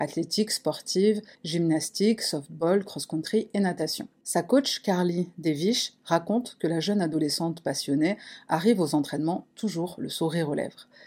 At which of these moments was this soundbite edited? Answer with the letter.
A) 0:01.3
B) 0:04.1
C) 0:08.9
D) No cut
A